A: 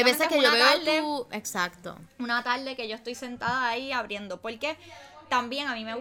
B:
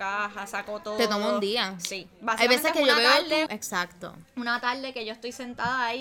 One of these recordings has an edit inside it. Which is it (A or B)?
B